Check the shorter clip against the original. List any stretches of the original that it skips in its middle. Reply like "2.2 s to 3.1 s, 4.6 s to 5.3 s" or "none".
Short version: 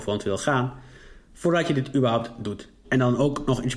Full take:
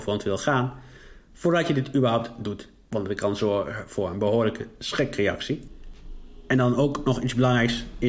2.8 s to 6.4 s

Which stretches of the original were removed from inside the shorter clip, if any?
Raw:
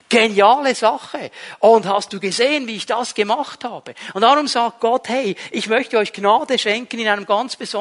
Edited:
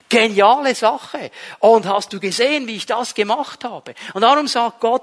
none

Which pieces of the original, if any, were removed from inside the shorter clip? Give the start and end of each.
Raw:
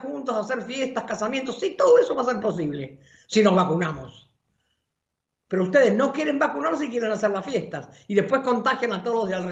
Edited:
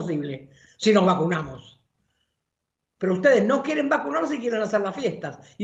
none

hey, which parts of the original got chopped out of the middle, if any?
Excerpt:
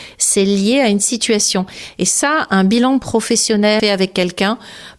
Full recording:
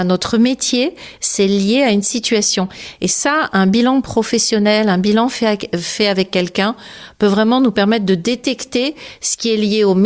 4.8 s to 6.0 s

